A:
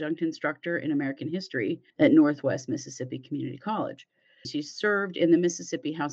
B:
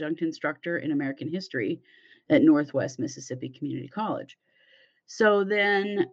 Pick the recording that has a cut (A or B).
A